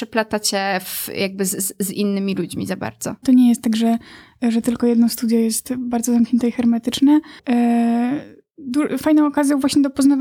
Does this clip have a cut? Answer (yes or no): yes